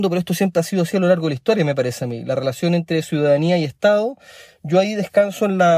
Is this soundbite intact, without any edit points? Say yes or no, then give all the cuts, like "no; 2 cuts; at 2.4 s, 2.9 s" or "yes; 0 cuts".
yes; 0 cuts